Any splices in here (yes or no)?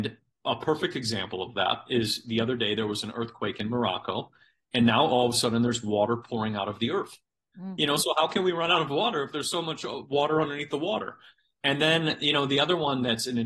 yes